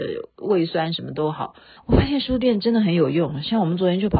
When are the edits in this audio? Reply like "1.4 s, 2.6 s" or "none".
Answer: 1.8 s